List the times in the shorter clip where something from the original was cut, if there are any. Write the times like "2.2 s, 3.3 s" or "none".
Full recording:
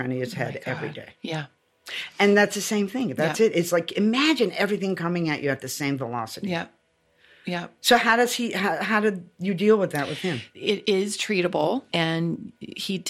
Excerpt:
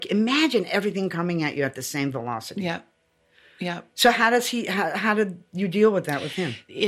none

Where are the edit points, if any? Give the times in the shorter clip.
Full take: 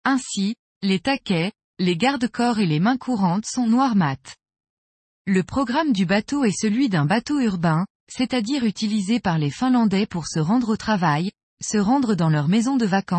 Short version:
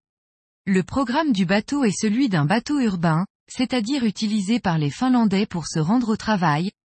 none

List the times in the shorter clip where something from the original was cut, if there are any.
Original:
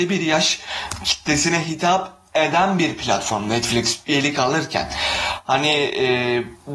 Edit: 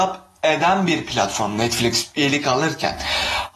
none

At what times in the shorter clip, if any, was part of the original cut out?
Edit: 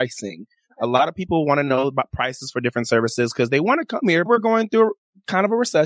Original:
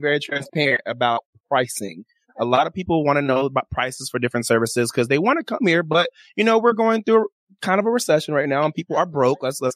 4.3 s

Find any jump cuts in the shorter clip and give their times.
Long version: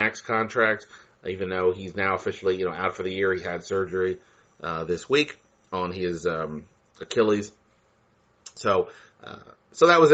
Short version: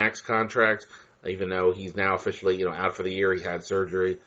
none

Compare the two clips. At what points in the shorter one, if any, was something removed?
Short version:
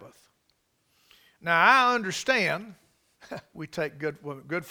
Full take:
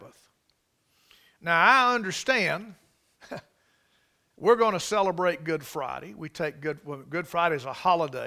3.5 s

